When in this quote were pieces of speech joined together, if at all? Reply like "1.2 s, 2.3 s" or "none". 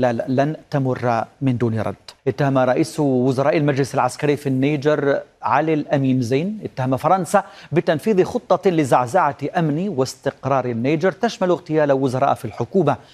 2.2 s